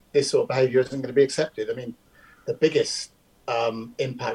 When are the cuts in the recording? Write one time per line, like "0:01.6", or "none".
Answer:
none